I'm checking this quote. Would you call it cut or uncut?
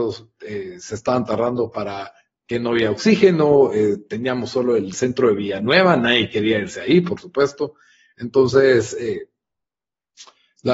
uncut